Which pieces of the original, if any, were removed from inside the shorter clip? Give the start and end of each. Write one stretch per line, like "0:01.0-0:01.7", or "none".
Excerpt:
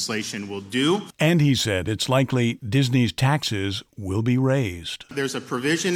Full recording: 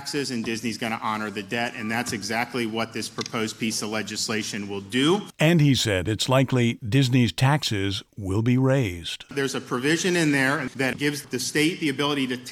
none